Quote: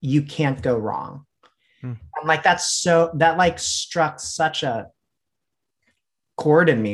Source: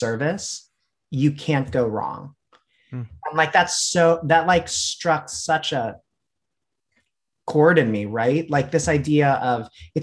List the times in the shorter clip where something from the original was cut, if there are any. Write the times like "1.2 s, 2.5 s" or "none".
none